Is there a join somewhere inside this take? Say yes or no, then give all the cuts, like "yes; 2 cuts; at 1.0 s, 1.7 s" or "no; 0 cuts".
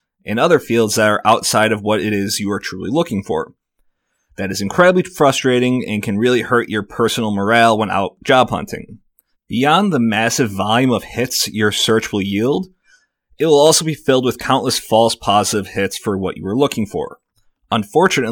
yes; 1 cut; at 9.3 s